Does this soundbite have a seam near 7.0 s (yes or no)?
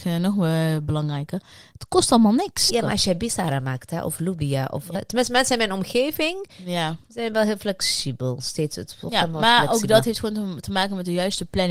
no